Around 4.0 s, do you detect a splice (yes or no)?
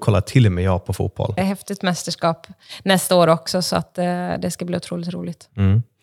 no